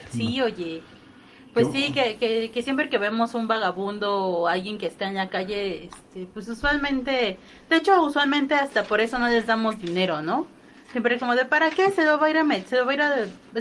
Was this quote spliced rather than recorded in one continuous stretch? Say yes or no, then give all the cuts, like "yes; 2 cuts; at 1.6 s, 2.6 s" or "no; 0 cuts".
no; 0 cuts